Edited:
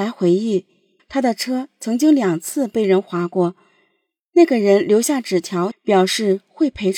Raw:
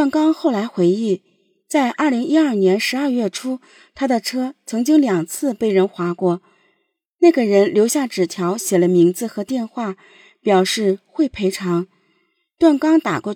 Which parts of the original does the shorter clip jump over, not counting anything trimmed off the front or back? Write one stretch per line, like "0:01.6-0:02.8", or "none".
0:01.6-0:03.9
0:08.6-0:10.3